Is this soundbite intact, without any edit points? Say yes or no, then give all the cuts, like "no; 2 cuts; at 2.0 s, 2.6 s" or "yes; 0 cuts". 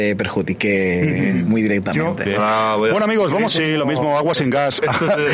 no; 2 cuts; at 2.3 s, 3.5 s